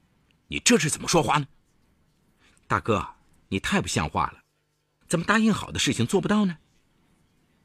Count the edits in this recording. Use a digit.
1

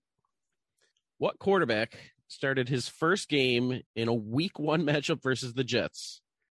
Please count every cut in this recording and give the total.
1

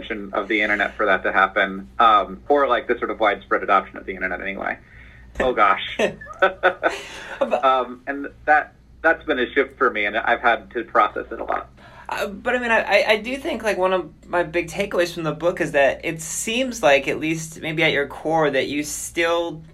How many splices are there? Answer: 2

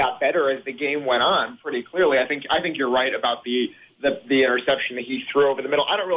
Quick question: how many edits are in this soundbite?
0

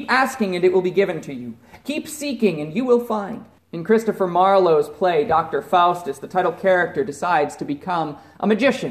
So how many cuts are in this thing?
1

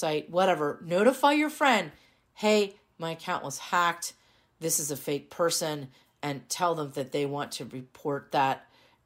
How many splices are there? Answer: 0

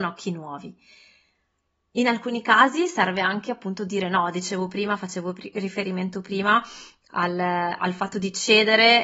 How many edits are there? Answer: 0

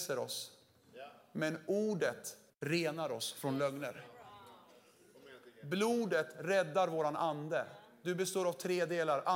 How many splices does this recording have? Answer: 1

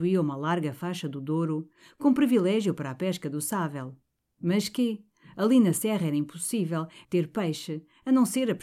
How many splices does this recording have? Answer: 2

